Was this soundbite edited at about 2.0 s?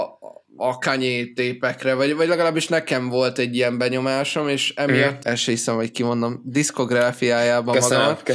no; 1 cut; at 5.2 s

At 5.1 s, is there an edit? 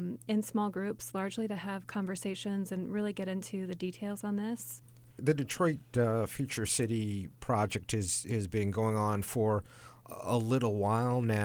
no; 0 cuts

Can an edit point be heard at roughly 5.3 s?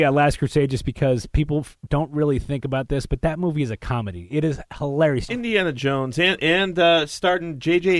yes; 1 cut; at 5.3 s

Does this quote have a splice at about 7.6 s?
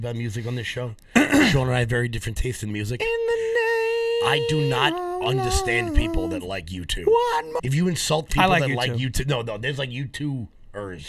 yes; 1 cut; at 7.6 s

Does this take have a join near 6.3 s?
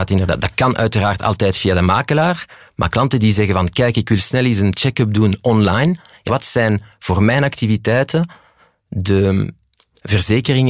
yes; 1 cut; at 6.3 s

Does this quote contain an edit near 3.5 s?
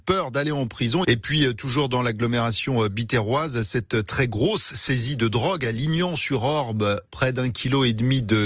no; 1 cut; at 1.0 s

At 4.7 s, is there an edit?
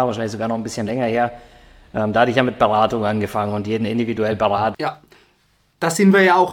yes; 1 cut; at 4.7 s

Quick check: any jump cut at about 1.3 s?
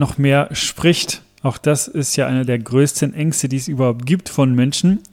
no; 0 cuts

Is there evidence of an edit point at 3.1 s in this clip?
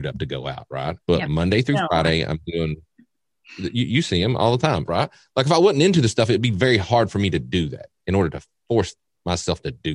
no; 2 cuts; at 1.0 s, 4.9 s

